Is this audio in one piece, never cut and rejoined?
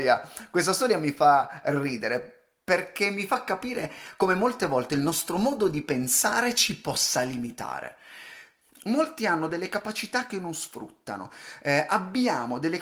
no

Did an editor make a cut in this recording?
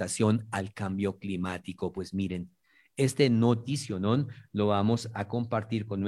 no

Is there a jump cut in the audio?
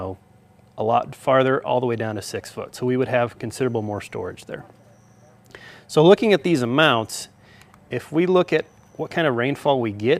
no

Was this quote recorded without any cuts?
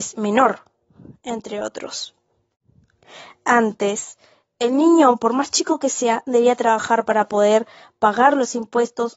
yes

